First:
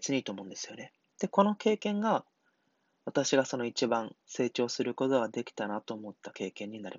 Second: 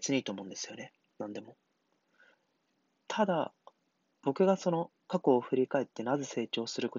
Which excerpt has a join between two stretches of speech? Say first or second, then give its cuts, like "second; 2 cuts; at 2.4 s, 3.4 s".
first; 2 cuts; at 1.1 s, 4.2 s